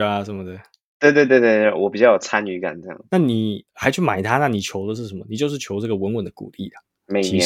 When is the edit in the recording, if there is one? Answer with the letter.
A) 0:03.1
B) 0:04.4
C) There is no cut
A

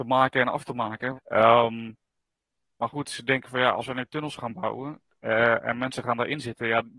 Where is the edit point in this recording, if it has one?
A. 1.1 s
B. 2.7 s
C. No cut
A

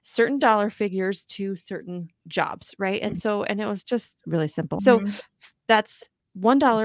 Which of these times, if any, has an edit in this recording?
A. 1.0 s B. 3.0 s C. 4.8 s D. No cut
C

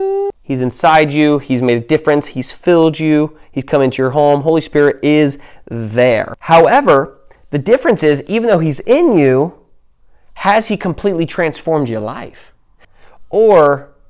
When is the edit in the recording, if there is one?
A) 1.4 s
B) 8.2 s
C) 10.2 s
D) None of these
D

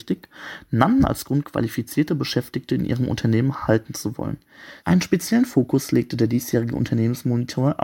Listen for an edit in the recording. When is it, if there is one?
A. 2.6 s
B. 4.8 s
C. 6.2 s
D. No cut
B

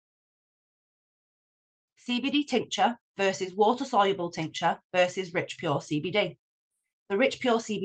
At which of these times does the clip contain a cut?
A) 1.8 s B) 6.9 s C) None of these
B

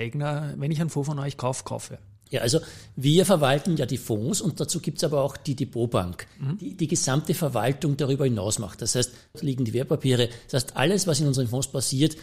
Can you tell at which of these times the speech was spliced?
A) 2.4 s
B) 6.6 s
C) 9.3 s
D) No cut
C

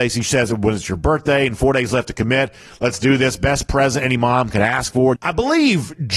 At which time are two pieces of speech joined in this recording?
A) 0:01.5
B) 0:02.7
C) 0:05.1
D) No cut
C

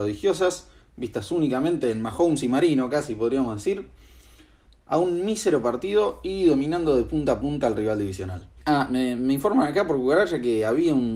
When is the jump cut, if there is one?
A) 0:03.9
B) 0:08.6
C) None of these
B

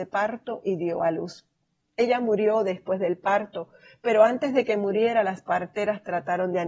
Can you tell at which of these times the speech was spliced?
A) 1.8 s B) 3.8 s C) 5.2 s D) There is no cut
D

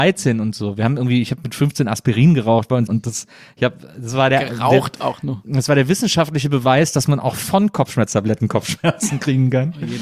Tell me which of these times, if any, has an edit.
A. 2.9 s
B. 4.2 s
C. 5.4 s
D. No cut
A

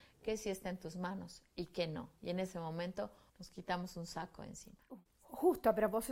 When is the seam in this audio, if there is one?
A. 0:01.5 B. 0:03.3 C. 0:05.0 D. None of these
B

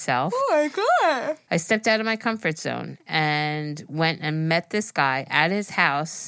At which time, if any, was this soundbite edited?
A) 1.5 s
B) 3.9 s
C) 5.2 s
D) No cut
A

